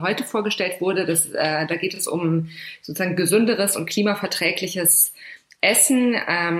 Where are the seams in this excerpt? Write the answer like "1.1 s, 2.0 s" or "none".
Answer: none